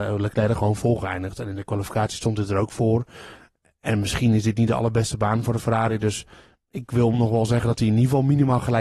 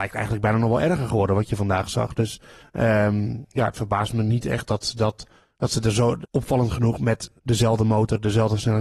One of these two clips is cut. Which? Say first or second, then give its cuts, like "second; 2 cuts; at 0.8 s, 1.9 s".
second; 2 cuts; at 6.2 s, 7.4 s